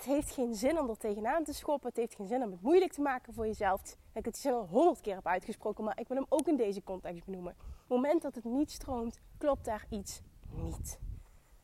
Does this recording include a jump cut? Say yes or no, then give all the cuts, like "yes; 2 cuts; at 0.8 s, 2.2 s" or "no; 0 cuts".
yes; 2 cuts; at 3.8 s, 7.8 s